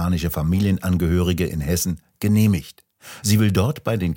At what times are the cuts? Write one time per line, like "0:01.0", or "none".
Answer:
none